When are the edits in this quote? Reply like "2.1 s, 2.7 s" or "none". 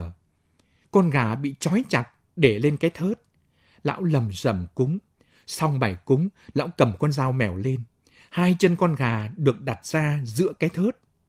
none